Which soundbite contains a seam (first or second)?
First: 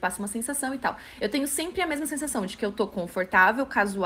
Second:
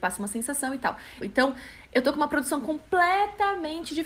second